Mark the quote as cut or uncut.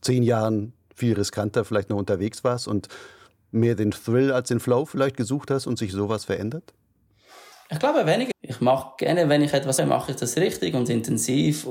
cut